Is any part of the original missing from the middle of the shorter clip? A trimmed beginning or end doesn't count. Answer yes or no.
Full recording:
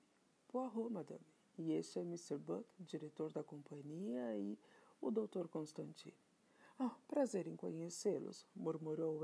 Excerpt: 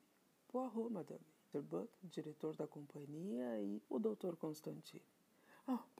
yes